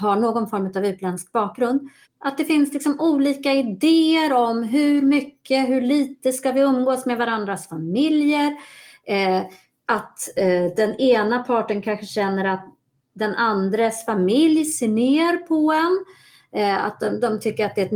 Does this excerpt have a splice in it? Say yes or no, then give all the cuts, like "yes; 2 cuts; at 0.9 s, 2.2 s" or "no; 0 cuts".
yes; 1 cut; at 2.0 s